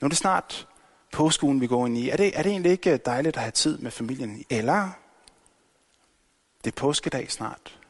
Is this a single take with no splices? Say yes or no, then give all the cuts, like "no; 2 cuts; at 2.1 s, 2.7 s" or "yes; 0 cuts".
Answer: no; 1 cut; at 4.4 s